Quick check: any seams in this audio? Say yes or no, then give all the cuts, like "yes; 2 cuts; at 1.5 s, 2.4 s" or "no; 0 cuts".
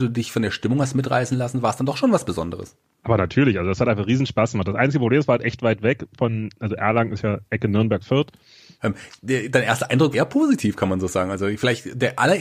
yes; 2 cuts; at 8.8 s, 10.1 s